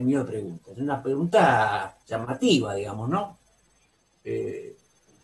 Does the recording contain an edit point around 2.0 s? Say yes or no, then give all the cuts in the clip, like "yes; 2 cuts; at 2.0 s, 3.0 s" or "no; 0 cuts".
yes; 1 cut; at 2.0 s